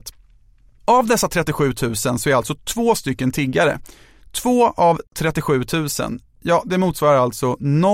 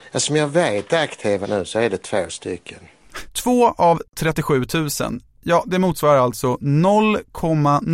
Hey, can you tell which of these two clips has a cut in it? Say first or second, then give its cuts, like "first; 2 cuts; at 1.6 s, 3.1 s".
second; 2 cuts; at 1.4 s, 3.3 s